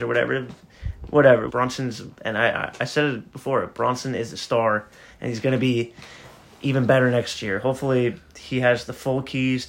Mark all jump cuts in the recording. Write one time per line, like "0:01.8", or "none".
0:01.5